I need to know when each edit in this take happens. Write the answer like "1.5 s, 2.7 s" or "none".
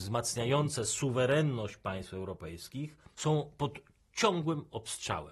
3.1 s